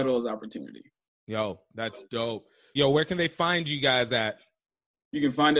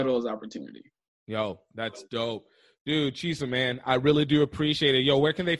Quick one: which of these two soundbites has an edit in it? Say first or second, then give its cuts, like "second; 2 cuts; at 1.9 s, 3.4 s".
first; 1 cut; at 2.8 s